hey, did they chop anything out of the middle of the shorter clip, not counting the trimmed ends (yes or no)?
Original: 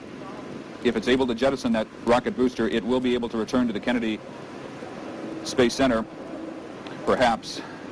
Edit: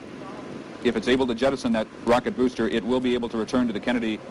no